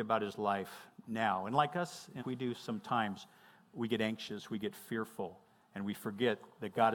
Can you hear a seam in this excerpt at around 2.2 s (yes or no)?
yes